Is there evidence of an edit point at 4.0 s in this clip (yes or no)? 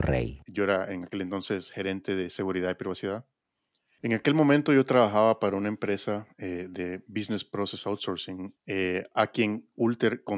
yes